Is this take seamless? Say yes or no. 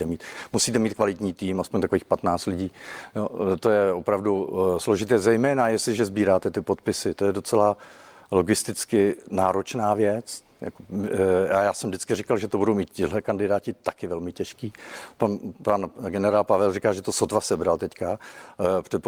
yes